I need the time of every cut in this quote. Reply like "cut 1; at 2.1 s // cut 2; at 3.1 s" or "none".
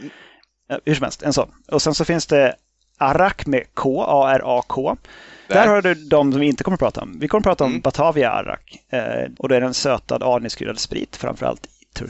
cut 1; at 5.5 s // cut 2; at 9.3 s